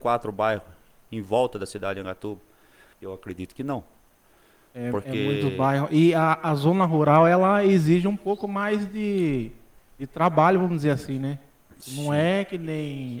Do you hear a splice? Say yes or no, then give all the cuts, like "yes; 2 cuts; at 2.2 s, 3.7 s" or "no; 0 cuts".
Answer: yes; 1 cut; at 2.9 s